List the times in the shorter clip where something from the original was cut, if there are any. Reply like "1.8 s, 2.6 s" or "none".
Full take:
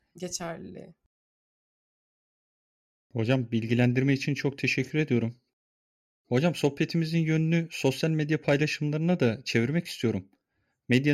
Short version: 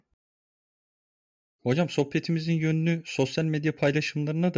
1.4 s